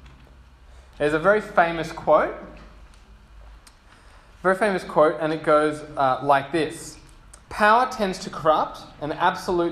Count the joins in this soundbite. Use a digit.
2